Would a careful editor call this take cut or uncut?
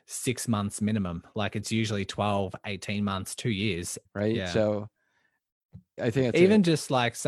cut